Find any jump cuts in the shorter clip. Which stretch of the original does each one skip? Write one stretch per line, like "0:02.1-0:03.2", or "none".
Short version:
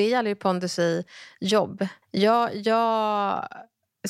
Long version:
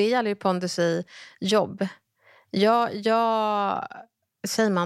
0:02.0-0:02.4